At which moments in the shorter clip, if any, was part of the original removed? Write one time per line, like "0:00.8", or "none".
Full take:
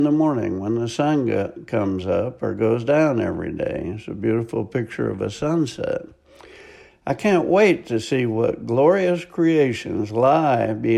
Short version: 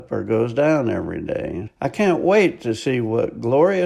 0:01.7

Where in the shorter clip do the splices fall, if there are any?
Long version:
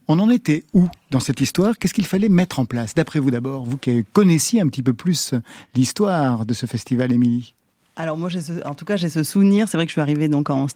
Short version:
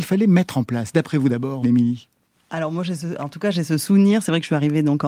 0:01.6

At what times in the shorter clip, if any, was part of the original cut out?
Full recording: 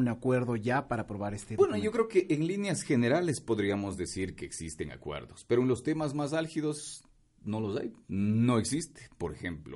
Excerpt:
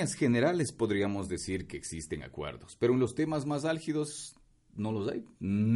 none

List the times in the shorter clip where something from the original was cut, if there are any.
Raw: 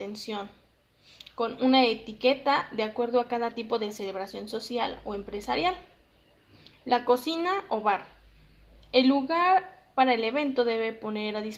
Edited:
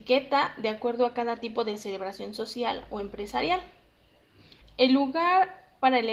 0:04.6

